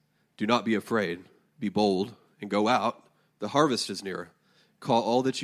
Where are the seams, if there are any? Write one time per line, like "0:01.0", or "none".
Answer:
none